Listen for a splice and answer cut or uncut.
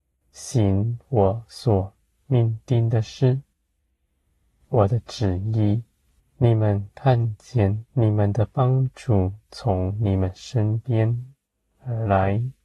cut